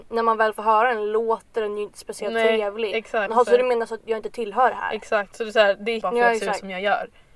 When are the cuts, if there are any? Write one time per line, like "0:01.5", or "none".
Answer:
0:03.3
0:06.0

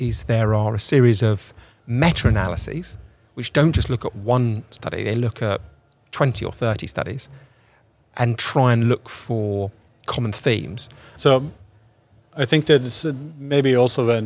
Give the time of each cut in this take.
0:11.2

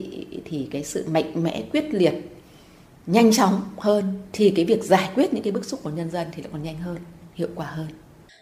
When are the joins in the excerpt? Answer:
none

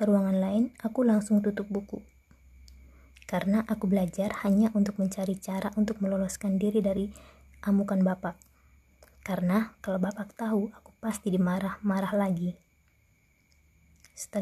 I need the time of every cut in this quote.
none

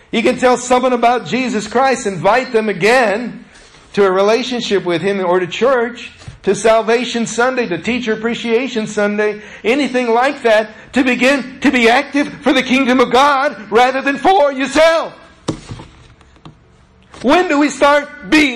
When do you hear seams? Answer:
none

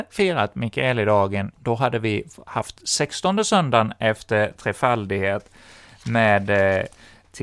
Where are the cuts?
0:01.5

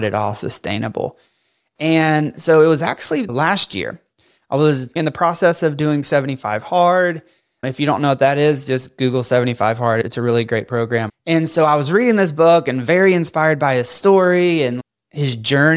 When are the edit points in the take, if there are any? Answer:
0:11.1

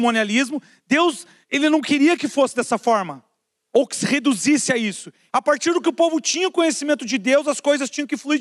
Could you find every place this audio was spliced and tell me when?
0:01.4
0:05.3

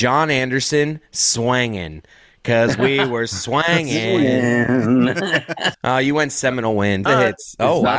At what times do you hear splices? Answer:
0:05.7
0:07.1

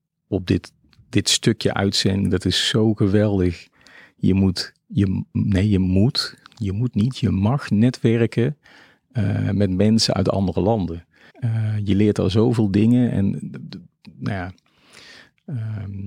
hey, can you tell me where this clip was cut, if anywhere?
0:11.3

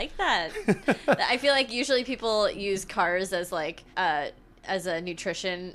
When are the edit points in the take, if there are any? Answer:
0:03.9

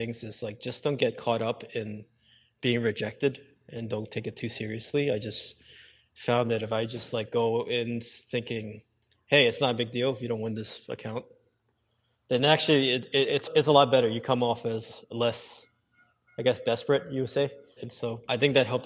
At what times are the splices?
0:17.8

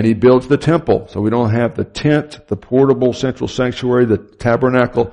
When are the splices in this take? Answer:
none

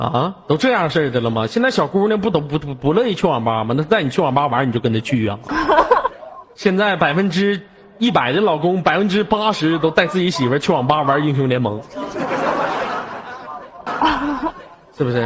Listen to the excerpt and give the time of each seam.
0:05.5
0:13.9

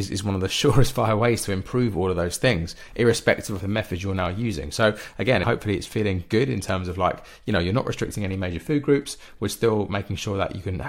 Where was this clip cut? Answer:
0:05.4

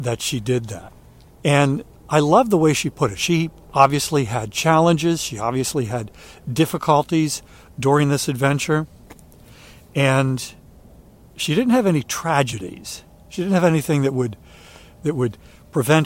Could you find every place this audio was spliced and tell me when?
0:01.3

